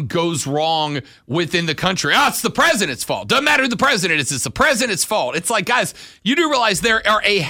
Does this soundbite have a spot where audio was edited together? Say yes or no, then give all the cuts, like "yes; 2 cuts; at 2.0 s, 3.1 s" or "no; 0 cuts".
no; 0 cuts